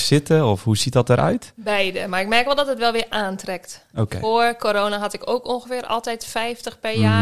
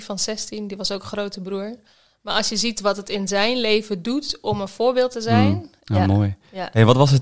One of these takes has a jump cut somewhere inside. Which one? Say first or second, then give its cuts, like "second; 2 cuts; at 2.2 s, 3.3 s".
second; 1 cut; at 5.8 s